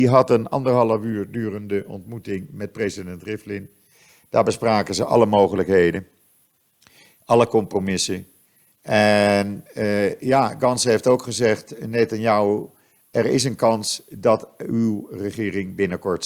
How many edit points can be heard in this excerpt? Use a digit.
0